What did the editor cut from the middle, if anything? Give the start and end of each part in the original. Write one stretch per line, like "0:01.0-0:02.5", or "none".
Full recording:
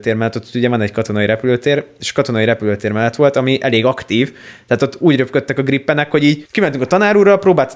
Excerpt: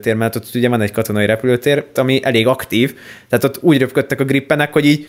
0:02.0-0:03.3